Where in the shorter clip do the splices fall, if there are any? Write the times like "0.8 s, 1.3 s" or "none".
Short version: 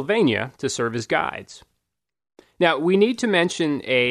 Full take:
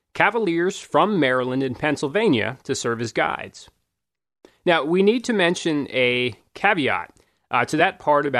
none